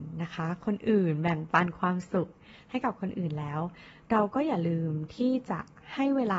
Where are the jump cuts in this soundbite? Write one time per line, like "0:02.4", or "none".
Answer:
none